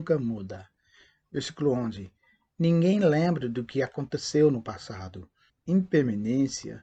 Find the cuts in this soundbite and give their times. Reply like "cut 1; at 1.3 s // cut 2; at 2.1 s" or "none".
cut 1; at 5.5 s